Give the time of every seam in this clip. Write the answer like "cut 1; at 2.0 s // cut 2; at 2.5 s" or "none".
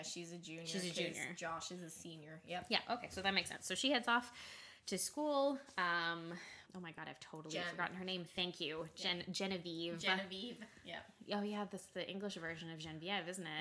cut 1; at 6.7 s